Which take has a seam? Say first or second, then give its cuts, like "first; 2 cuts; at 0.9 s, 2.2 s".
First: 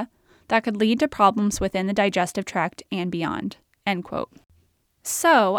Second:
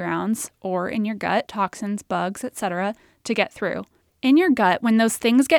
second; 2 cuts; at 1.5 s, 4.0 s